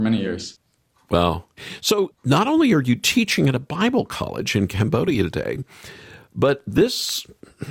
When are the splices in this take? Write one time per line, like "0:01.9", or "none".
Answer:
none

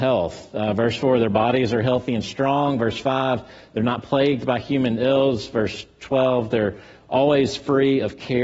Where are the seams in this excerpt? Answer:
none

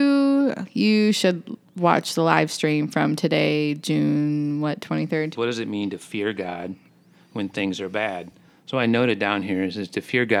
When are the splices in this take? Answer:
0:05.4

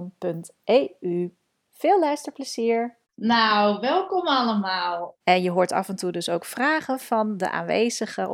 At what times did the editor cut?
0:03.0
0:05.2

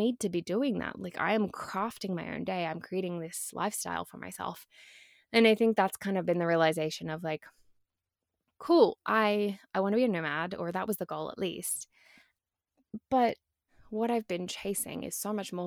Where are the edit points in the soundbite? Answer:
none

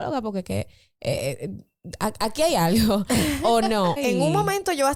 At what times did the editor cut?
0:04.0

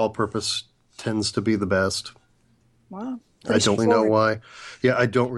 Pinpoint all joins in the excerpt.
0:03.8

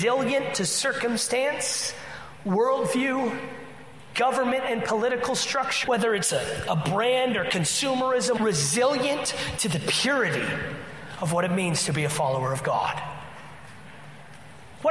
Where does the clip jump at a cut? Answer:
0:05.8
0:08.4

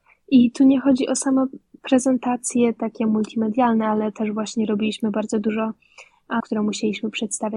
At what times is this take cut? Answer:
0:06.4

